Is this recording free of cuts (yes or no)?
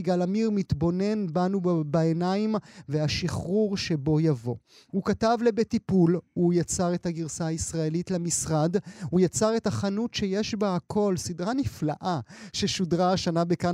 yes